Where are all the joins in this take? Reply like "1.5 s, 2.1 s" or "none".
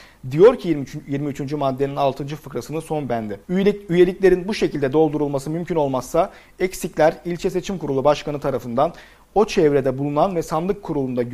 3.4 s